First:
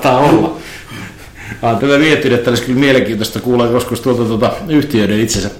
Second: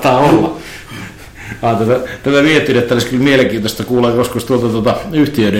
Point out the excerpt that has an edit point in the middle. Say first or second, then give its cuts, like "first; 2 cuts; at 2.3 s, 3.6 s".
first; 1 cut; at 1.8 s